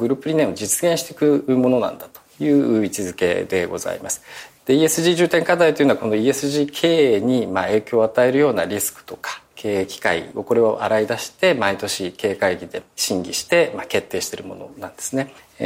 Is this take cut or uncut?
uncut